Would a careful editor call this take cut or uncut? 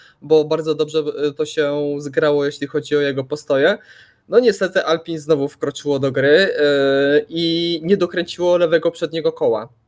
uncut